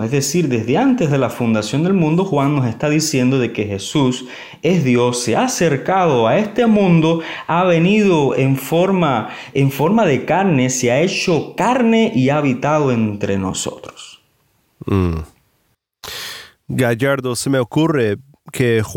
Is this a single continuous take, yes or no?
yes